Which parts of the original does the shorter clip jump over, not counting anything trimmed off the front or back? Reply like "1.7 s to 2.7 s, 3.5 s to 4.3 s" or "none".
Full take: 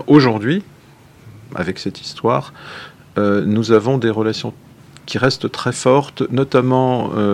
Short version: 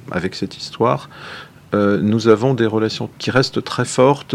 4.6 s to 5.0 s